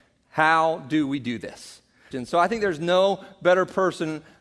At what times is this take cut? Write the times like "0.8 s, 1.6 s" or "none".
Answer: 2.1 s